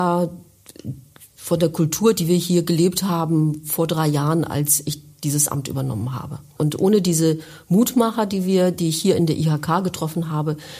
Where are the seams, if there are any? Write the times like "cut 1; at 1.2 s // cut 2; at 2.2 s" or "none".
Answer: cut 1; at 6.6 s

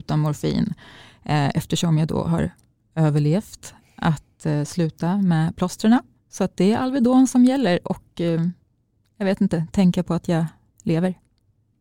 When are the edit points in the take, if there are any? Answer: none

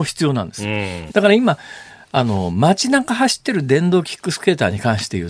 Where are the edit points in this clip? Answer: cut 1; at 1.1 s

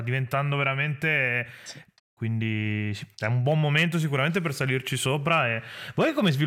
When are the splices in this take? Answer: cut 1; at 2.0 s

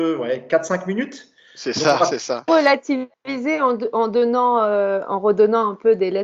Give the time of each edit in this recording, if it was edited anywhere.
cut 1; at 2.5 s

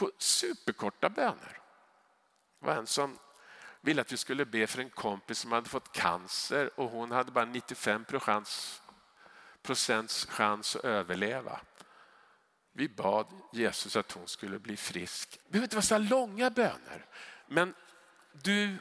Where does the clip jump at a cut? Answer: cut 1; at 15.4 s // cut 2; at 17.4 s

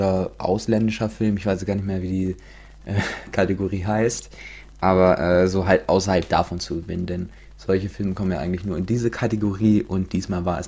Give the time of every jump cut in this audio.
none

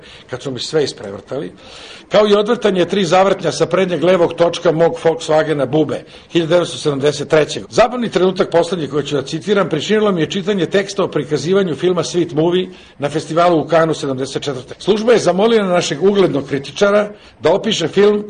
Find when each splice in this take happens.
cut 1; at 7.6 s // cut 2; at 14.7 s

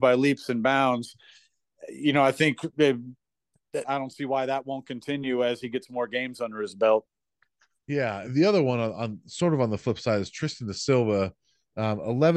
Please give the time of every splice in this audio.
cut 1; at 3.8 s // cut 2; at 8.3 s

